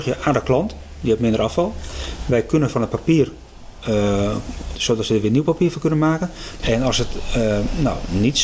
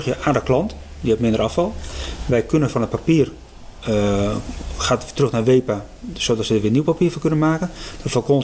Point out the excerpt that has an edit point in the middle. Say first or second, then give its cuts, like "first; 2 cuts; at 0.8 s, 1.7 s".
first; 2 cuts; at 4.7 s, 6.6 s